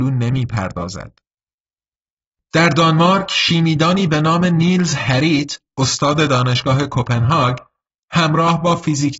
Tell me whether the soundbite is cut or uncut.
uncut